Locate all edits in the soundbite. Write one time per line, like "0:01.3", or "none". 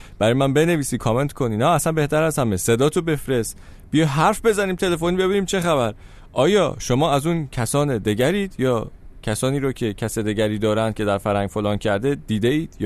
none